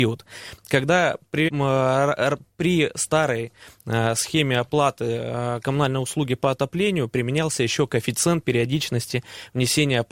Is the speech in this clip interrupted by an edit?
yes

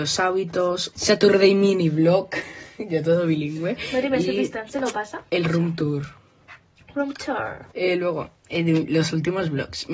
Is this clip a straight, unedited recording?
no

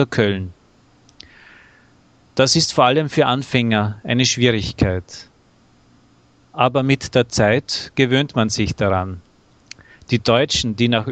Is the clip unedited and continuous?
yes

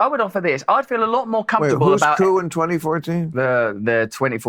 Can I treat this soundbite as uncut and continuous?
yes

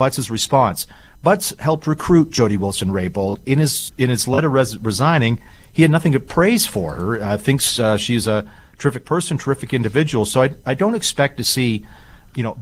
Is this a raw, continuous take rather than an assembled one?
yes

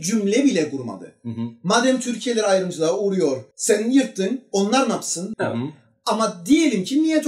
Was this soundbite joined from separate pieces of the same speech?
yes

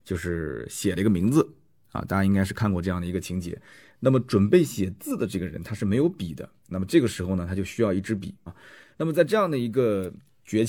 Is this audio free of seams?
no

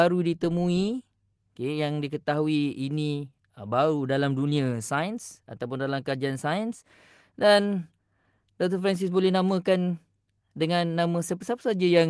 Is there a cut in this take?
no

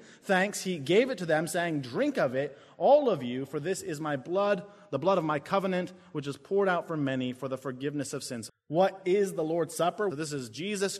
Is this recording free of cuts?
no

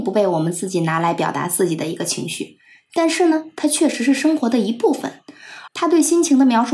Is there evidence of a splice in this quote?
yes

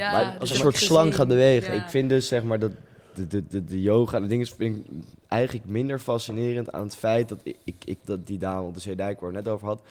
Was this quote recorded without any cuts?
no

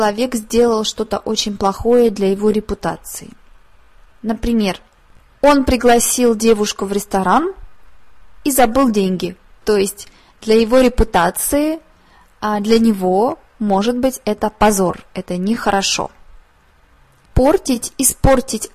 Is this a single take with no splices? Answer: no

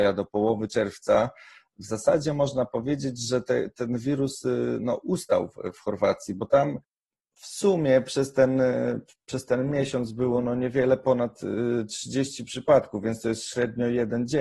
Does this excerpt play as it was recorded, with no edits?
yes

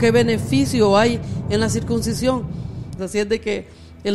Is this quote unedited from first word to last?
no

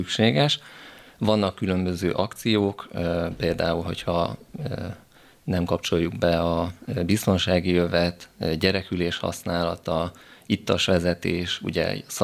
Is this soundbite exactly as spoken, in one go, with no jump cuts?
yes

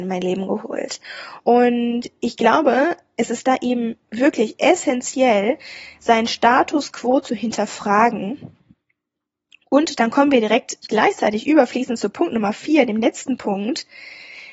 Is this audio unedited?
yes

